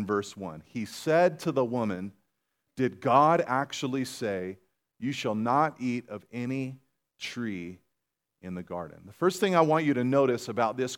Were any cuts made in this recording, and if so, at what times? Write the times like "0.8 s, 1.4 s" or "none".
none